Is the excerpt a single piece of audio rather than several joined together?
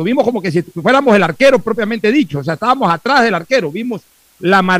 yes; 0 cuts

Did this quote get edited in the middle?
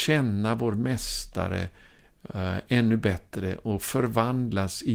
no; 0 cuts

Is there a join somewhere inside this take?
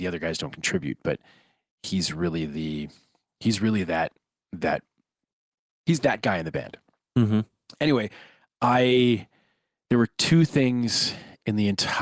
no; 0 cuts

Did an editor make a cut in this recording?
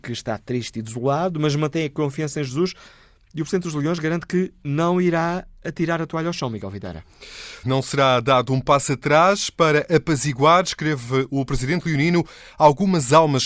yes; 1 cut; at 7.6 s

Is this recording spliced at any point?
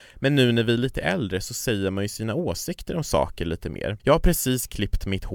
yes; 1 cut; at 4.0 s

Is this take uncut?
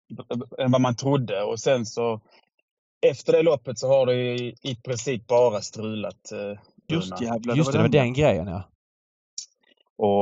no; 1 cut; at 6.9 s

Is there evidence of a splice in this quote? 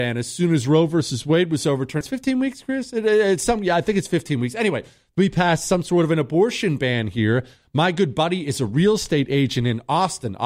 yes; 1 cut; at 2.0 s

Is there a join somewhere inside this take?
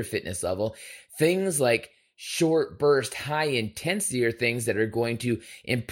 no; 0 cuts

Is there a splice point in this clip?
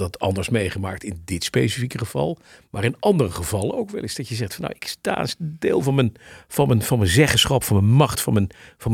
no; 0 cuts

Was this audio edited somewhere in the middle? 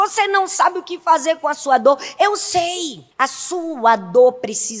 yes; 1 cut; at 3.1 s

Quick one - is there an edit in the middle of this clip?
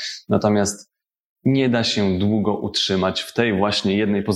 no; 0 cuts

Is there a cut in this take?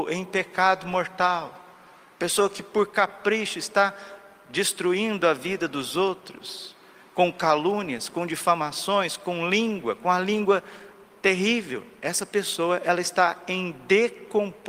no; 0 cuts

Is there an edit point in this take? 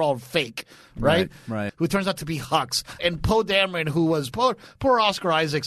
yes; 3 cuts; at 1.7 s, 3.0 s, 4.3 s

